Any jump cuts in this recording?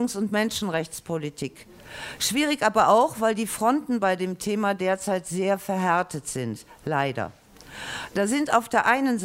yes; 1 cut; at 2.2 s

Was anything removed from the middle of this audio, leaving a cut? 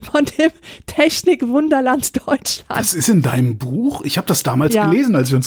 no; 0 cuts

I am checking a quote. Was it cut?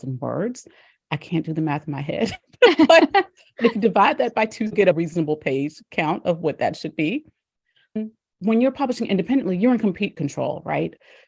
no; 0 cuts

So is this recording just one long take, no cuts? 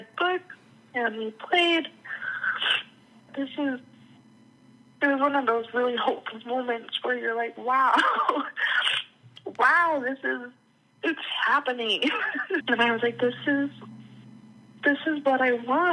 no; 2 cuts; at 3.3 s, 12.6 s

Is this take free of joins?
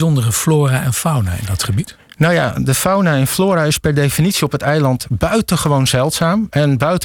yes; 0 cuts

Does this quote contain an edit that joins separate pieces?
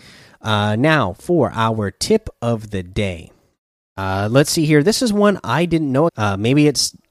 yes; 1 cut; at 6.1 s

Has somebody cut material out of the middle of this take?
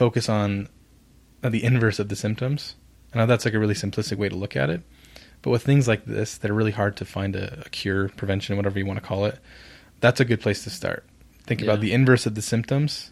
no; 0 cuts

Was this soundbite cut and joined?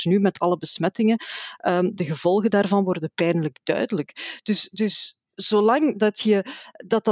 no; 0 cuts

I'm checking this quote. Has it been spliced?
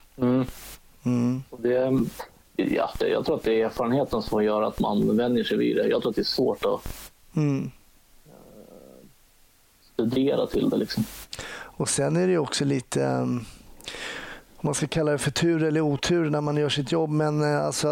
yes; 1 cut; at 3.0 s

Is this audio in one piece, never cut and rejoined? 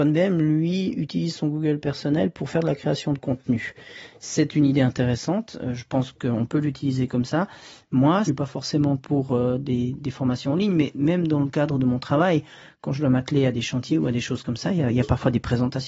no; 1 cut; at 8.3 s

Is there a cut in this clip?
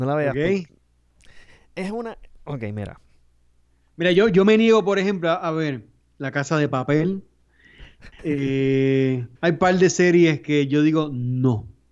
yes; 2 cuts; at 8.2 s, 9.4 s

